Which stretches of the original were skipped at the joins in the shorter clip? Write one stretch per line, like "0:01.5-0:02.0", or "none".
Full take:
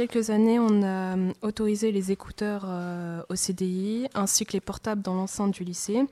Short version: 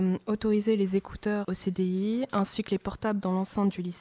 0:02.6-0:03.3